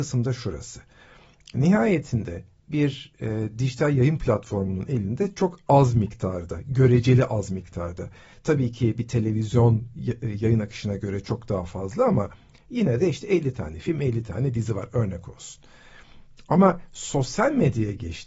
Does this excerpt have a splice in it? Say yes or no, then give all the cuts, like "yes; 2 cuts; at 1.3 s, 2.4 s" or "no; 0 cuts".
no; 0 cuts